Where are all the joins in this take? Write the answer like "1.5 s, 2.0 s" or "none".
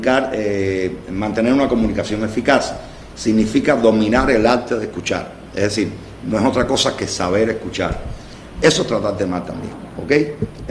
8.5 s